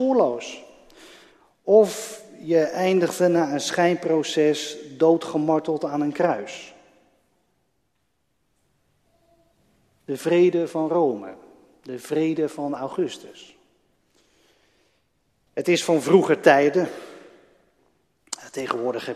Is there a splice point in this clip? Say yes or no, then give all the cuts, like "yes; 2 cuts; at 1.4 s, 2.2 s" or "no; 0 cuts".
no; 0 cuts